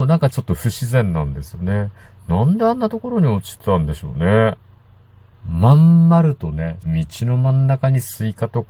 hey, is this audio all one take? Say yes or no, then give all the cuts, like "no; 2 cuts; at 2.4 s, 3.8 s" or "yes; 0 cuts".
no; 2 cuts; at 5.3 s, 6.8 s